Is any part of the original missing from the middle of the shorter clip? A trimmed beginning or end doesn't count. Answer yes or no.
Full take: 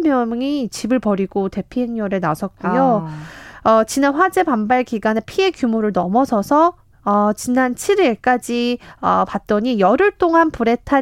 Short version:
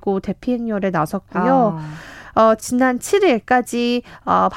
yes